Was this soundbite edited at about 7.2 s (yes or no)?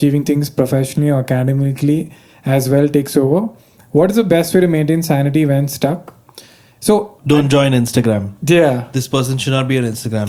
yes